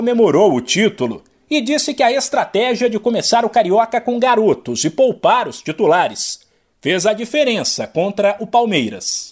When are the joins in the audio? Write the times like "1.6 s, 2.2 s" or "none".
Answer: none